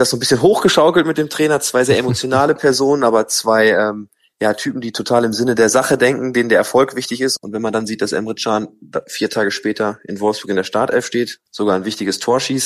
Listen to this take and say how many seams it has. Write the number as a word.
two